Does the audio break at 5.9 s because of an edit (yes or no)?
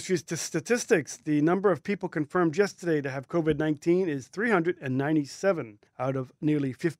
yes